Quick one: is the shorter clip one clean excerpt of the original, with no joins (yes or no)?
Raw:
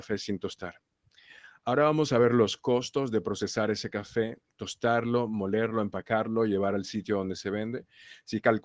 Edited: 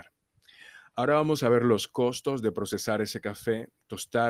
yes